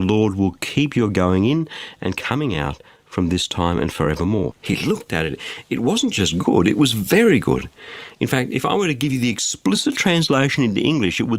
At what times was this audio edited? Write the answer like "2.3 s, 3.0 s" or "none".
4.5 s